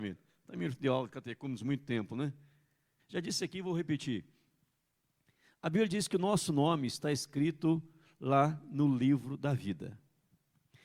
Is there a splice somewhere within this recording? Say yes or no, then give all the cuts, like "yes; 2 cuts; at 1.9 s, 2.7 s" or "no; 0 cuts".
yes; 1 cut; at 3.0 s